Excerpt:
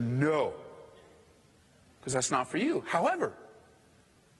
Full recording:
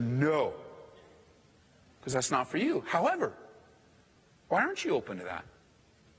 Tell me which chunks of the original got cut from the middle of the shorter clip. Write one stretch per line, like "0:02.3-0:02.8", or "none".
none

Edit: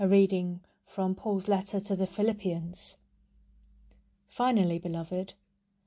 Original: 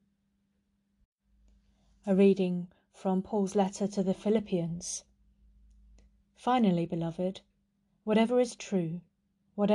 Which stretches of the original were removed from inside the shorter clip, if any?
none

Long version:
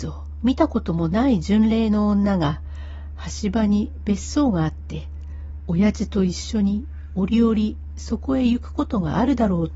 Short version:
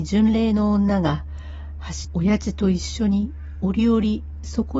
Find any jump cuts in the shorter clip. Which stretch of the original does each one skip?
0:03.4-0:05.6

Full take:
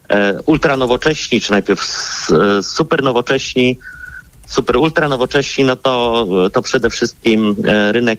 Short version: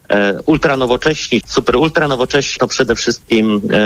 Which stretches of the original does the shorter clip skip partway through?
0:01.4-0:04.4
0:05.6-0:06.5

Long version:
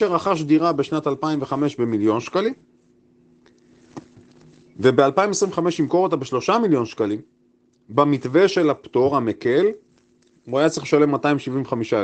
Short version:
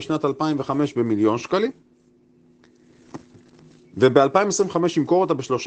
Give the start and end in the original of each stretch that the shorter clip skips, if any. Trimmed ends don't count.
none

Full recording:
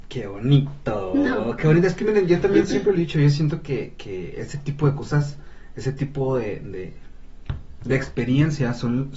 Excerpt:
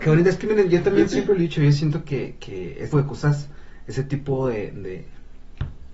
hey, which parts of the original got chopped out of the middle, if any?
0:04.5-0:04.8

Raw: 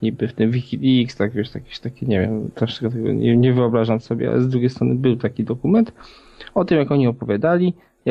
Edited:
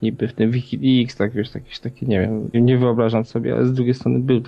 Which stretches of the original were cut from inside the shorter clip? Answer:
0:02.5-0:03.3

